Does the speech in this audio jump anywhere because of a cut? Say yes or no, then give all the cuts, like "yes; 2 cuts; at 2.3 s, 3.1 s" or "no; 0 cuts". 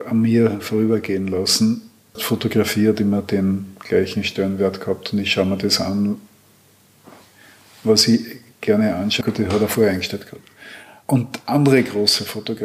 yes; 2 cuts; at 2.1 s, 9.2 s